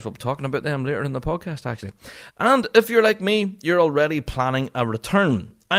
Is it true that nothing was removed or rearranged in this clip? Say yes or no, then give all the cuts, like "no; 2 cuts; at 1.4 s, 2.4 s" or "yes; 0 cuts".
no; 1 cut; at 2.3 s